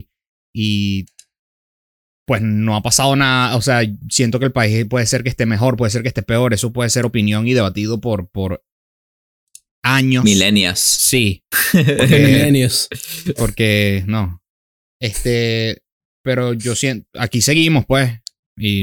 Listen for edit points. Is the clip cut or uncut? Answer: uncut